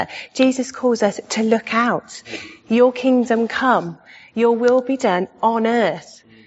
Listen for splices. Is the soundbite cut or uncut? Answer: uncut